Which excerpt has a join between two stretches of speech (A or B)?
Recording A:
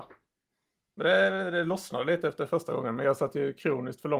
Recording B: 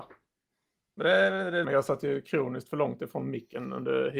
B